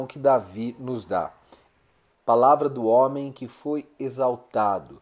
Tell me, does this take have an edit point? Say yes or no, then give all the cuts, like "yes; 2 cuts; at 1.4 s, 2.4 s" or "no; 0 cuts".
yes; 1 cut; at 2.1 s